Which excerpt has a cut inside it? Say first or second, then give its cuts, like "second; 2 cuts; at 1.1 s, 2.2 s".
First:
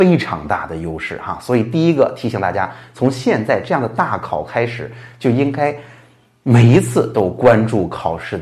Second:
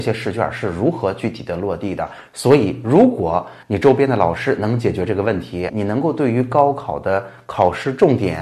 second; 3 cuts; at 2.3 s, 3.6 s, 5.7 s